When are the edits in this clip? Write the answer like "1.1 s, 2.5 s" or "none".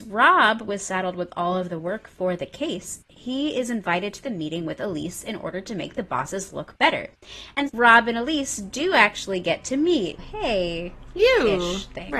7.7 s, 10.2 s